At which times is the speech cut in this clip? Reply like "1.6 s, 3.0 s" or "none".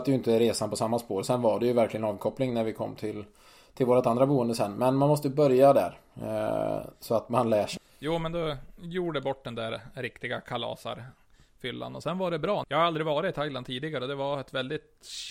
7.8 s, 12.6 s